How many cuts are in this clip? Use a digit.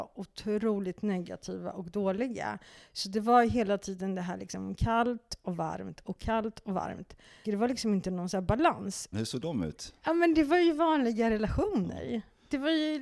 2